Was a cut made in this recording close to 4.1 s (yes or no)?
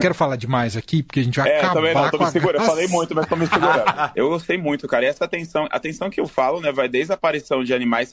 yes